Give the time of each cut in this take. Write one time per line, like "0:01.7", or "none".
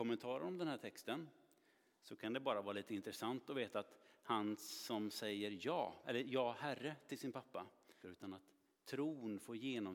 0:06.0
0:08.0

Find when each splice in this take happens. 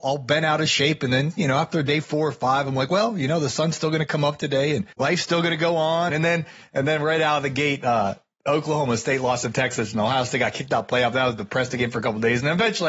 0:04.9
0:06.1

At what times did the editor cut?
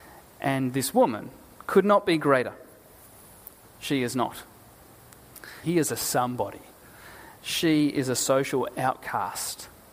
0:03.6
0:05.6

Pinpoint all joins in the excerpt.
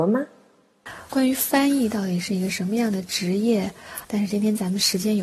0:01.1
0:04.0

